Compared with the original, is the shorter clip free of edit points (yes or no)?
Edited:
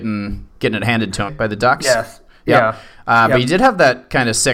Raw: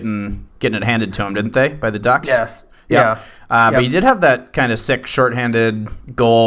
no